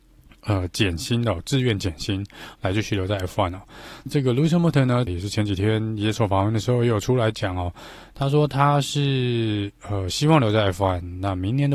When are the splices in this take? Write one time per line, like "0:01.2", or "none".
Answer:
0:04.1
0:05.1